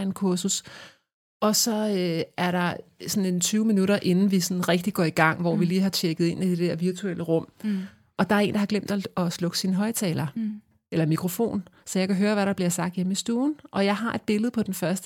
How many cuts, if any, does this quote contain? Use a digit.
0